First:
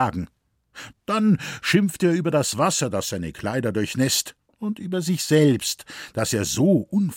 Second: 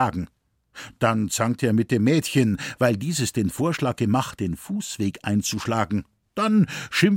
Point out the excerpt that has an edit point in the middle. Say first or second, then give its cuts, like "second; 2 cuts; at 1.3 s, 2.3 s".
first; 1 cut; at 0.9 s